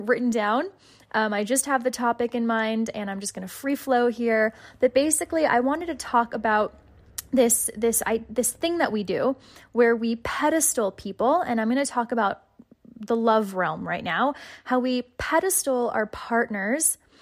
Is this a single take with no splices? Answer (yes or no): yes